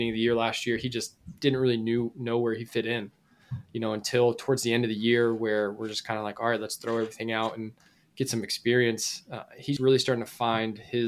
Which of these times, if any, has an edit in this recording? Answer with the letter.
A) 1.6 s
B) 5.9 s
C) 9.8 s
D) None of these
C